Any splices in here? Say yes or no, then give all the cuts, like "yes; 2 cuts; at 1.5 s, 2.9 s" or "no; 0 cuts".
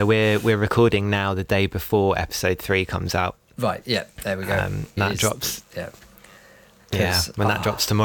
yes; 1 cut; at 5.0 s